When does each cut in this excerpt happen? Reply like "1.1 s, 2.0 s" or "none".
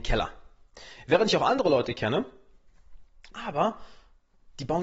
3.3 s